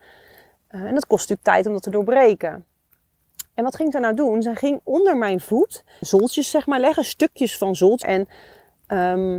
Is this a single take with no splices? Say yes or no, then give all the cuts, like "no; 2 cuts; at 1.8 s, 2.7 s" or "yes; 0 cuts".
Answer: no; 2 cuts; at 6.0 s, 8.0 s